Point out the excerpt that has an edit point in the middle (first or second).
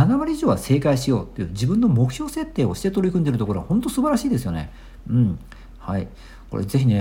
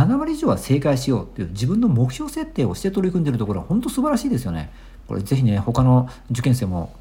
second